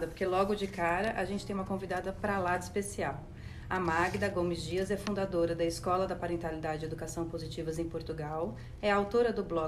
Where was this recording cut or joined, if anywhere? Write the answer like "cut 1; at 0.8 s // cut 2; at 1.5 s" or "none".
none

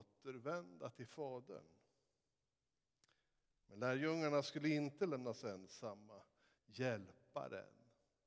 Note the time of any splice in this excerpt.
cut 1; at 6.6 s

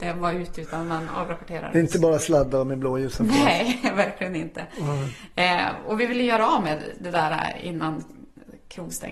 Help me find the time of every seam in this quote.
none

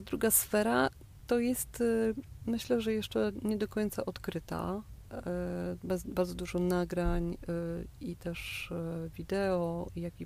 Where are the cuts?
none

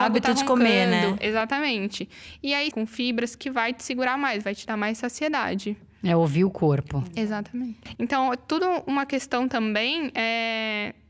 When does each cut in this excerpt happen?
cut 1; at 2.7 s // cut 2; at 7.9 s

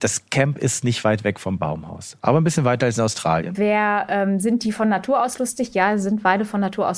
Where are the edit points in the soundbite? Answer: cut 1; at 3.5 s

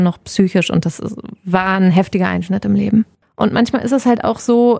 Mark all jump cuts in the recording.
none

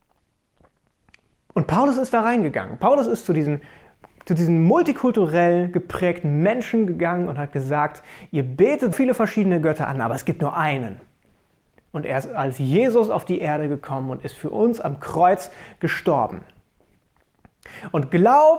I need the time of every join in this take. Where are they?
cut 1; at 8.9 s

